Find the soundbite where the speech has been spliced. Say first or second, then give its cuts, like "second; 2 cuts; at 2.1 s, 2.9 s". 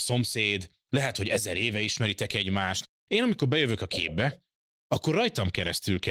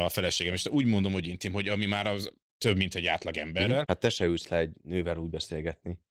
second; 1 cut; at 3.8 s